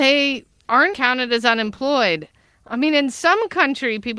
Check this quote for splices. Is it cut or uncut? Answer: cut